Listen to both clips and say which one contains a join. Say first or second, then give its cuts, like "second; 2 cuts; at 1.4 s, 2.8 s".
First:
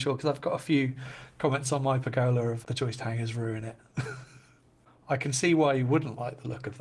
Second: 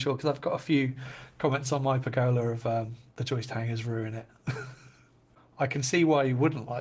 first; 1 cut; at 2.6 s